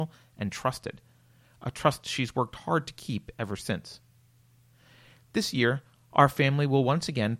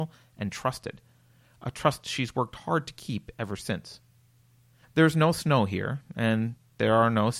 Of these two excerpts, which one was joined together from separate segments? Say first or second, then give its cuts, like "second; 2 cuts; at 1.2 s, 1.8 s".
second; 1 cut; at 4.8 s